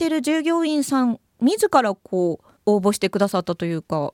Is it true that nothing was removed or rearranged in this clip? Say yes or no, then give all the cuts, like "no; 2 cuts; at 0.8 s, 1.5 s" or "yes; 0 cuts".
no; 2 cuts; at 1.3 s, 2.6 s